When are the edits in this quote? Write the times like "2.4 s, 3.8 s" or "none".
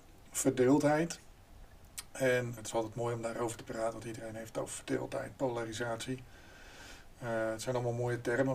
2.6 s